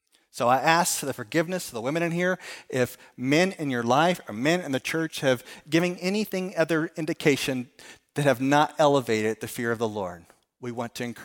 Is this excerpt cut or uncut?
uncut